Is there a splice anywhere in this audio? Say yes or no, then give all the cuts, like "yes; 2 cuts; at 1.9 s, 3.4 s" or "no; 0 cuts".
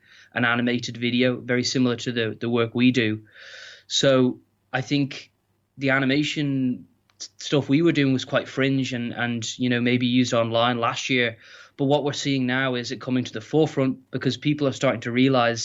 no; 0 cuts